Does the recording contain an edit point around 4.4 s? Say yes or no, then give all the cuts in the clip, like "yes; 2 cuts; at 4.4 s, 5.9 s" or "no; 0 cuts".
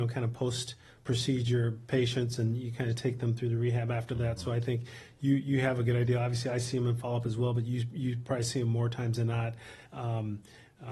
no; 1 cut; at 9.9 s